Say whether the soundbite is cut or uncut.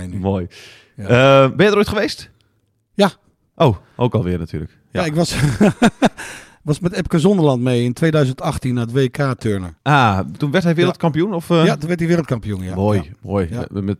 uncut